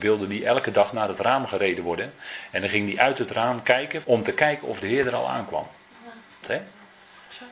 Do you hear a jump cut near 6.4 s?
yes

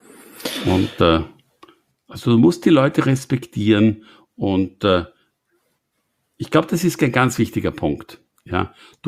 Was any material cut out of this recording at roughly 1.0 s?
no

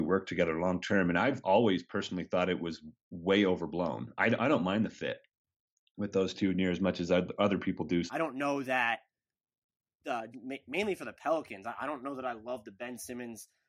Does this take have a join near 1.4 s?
no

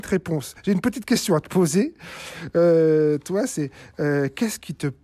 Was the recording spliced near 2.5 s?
no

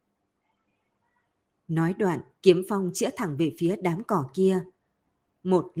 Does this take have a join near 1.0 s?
no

